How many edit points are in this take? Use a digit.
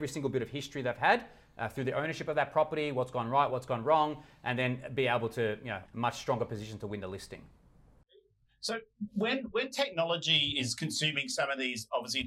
1